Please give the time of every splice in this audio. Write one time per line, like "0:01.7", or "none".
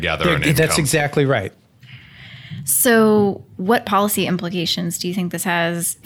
none